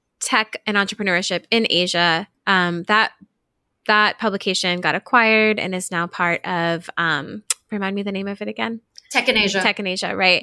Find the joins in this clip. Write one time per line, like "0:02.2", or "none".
none